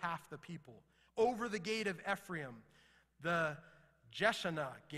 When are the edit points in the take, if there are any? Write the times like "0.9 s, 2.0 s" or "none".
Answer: 1.1 s